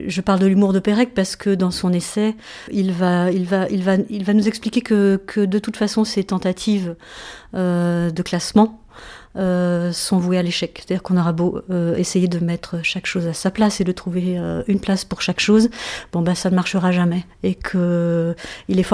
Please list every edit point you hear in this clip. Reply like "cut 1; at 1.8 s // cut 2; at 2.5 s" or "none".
none